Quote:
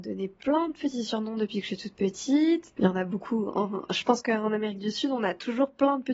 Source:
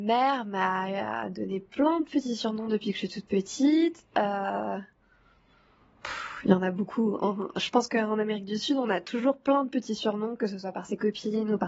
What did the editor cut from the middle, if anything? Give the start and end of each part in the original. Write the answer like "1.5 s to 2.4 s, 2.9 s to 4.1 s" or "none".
4.1 s to 6.4 s